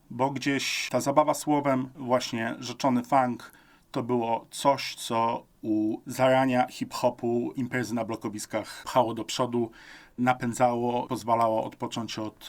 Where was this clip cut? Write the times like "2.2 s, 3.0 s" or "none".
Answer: none

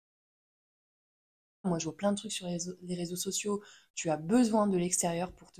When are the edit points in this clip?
1.6 s, 3.9 s

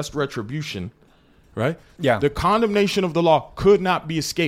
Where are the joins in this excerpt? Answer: 2.0 s

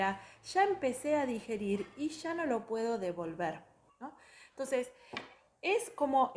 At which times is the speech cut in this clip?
3.9 s

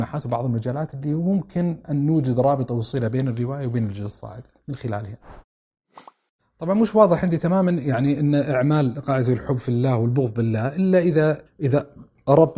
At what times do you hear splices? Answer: 6.4 s, 11.5 s

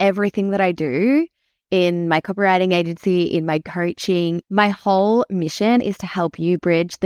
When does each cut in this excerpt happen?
4.4 s

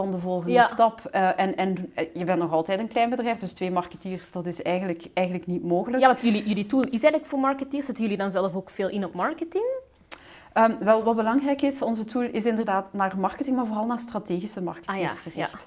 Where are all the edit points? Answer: none

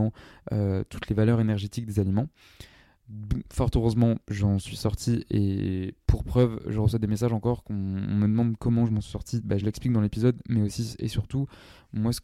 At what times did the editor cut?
none

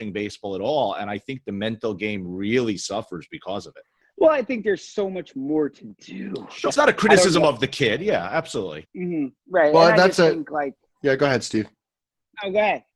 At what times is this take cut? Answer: 6.7 s, 8.8 s

